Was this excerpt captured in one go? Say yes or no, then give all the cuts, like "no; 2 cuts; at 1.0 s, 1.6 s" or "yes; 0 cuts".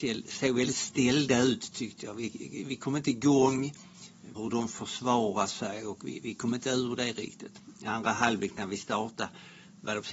no; 1 cut; at 4.3 s